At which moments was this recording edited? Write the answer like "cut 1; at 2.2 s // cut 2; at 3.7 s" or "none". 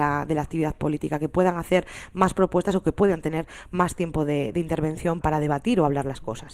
cut 1; at 5.2 s